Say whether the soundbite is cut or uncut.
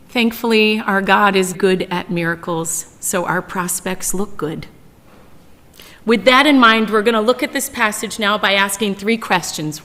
cut